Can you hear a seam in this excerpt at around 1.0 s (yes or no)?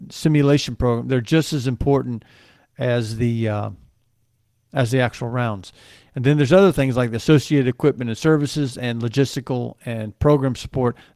no